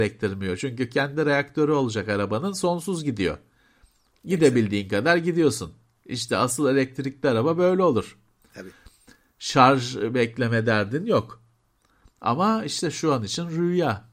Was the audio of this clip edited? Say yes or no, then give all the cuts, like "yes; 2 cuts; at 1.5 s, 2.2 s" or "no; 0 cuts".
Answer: no; 0 cuts